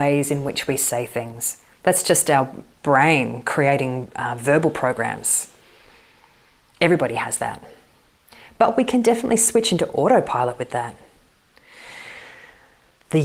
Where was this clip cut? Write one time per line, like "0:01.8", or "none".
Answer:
none